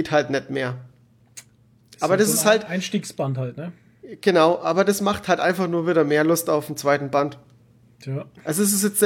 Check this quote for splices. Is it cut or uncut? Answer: uncut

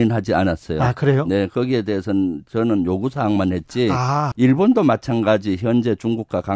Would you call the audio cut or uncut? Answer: cut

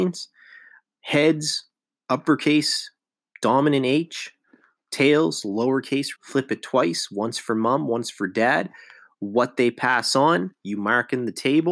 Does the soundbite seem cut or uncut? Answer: cut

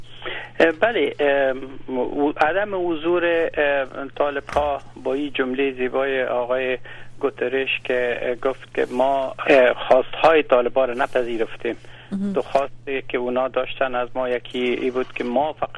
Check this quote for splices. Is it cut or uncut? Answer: cut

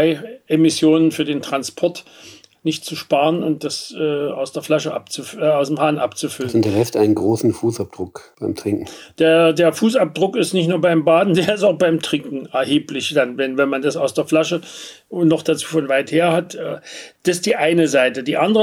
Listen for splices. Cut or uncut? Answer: uncut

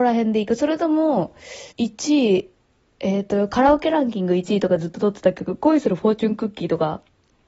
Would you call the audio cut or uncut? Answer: cut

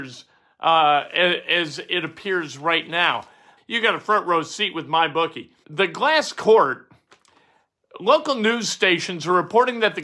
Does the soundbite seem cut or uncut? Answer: cut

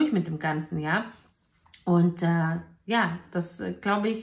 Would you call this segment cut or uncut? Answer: uncut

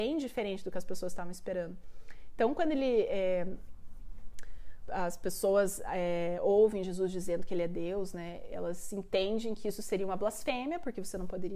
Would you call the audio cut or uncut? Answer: cut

